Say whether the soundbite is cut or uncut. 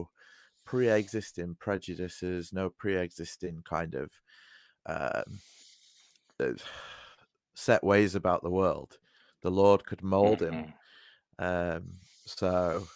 uncut